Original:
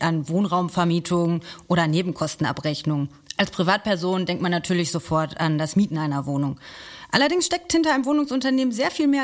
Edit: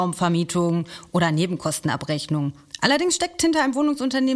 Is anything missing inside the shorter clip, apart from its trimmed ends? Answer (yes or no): yes